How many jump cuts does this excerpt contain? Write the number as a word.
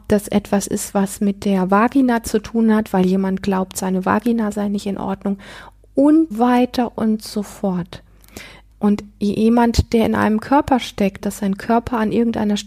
three